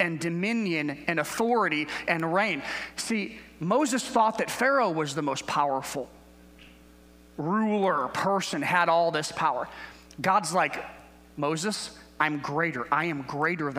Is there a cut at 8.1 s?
no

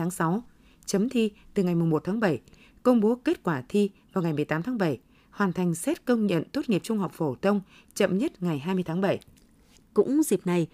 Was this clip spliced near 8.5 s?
no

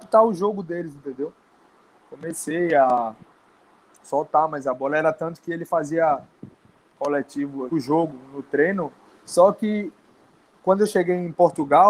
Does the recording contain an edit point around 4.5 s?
no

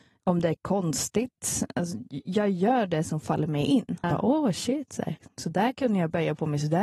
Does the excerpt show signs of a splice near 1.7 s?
no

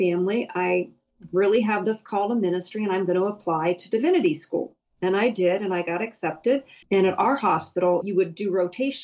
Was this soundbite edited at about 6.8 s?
yes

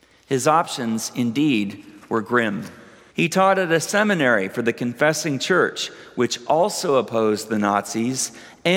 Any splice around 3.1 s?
yes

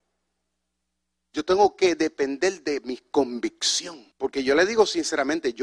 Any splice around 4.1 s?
yes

